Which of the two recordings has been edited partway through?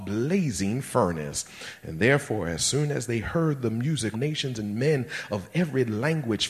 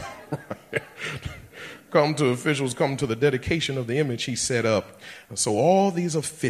first; 1 cut; at 4.1 s

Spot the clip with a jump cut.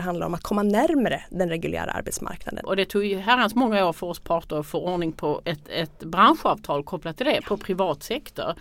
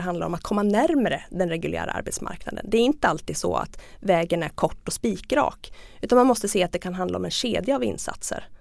first; 2 cuts; at 2.6 s, 7.4 s

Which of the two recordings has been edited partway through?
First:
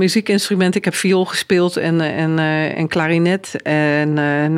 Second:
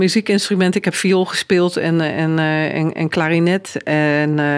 first; 1 cut; at 2.7 s

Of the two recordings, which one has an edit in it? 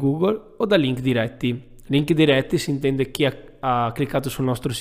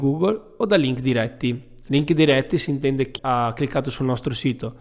second; 1 cut; at 3.2 s

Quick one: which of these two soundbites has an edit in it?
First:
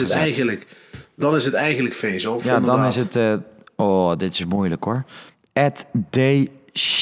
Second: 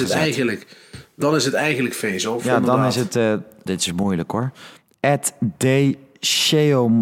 second; 1 cut; at 3.7 s

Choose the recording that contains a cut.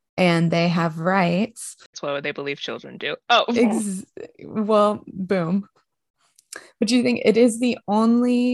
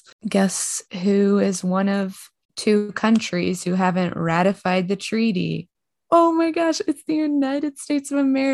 first; 1 cut; at 1.9 s

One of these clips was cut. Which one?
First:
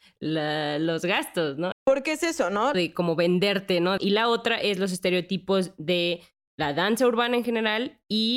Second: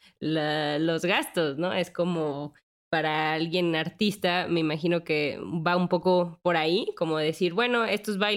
first; 3 cuts; at 1.7 s, 2.7 s, 4.0 s

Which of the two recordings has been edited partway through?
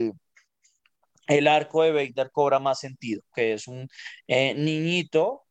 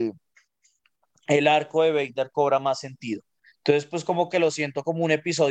first; 1 cut; at 3.3 s

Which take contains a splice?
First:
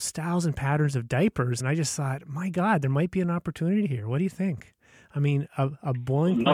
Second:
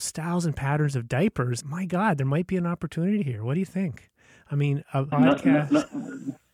second; 2 cuts; at 1.6 s, 5.1 s

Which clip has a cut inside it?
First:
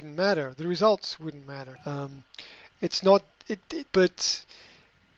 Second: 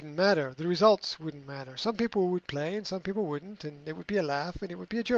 first; 2 cuts; at 1.8 s, 3.9 s

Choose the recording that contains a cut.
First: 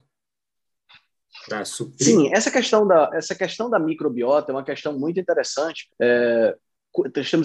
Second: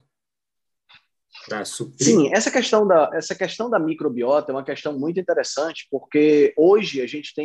first; 1 cut; at 5.9 s

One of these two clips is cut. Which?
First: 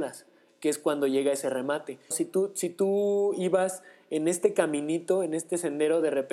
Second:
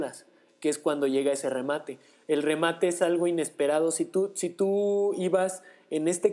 first; 1 cut; at 2.1 s

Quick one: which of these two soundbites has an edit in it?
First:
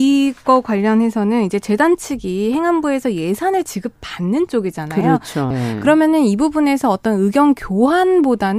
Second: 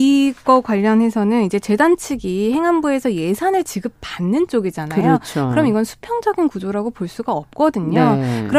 first; 1 cut; at 5.5 s

